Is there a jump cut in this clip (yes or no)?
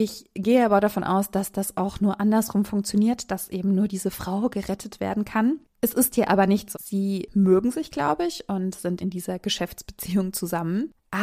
yes